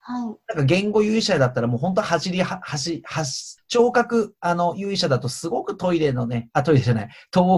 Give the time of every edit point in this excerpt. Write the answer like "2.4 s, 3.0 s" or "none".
3.6 s